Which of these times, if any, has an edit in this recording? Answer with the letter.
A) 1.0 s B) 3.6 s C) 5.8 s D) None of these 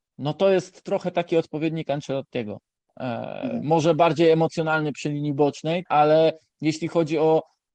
C